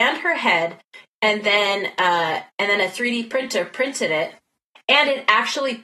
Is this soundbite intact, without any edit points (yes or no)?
yes